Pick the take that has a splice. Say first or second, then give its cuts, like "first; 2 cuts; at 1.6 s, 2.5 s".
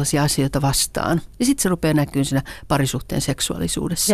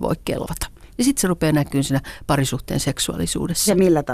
second; 1 cut; at 0.9 s